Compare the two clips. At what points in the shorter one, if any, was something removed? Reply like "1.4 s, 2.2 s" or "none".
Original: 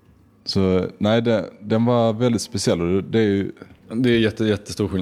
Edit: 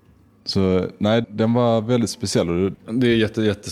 1.2 s, 2.7 s